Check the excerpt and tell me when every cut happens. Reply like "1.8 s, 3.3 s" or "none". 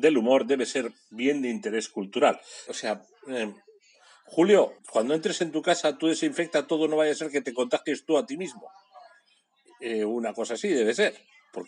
2.7 s, 4.8 s

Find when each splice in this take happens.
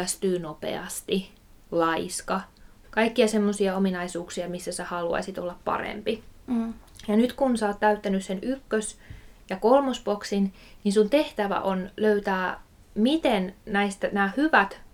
2.8 s

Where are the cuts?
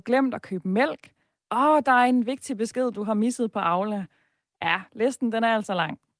none

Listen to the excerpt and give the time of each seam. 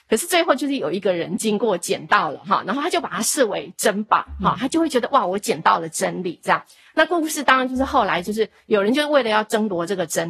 none

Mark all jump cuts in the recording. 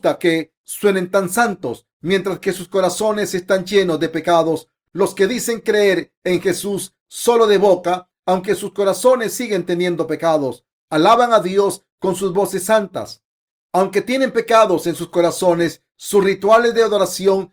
none

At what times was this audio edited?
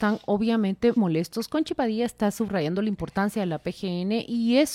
1.0 s

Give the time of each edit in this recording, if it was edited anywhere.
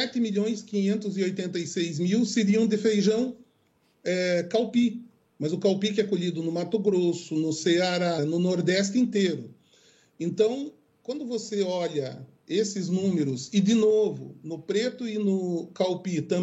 8.2 s

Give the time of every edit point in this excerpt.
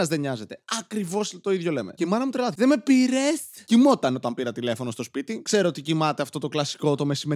2.6 s

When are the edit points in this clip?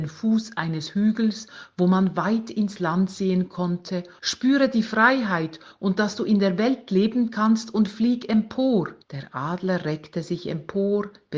4.2 s, 9.0 s

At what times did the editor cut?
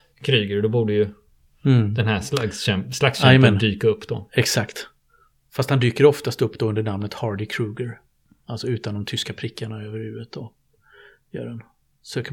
none

